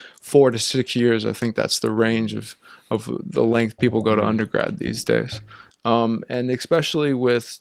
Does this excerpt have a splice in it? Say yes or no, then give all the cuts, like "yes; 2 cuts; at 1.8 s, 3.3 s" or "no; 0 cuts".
yes; 1 cut; at 5.7 s